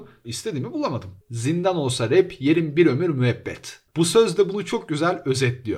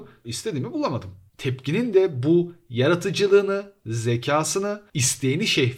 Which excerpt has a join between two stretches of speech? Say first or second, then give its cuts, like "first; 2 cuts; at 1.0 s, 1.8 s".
first; 2 cuts; at 1.2 s, 3.9 s